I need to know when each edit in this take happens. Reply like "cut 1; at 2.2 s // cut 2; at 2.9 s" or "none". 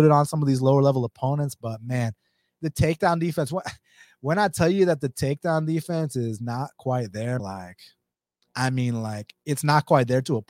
cut 1; at 7.4 s